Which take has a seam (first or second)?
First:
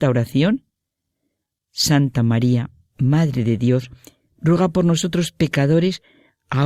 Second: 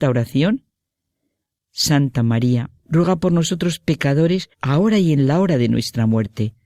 second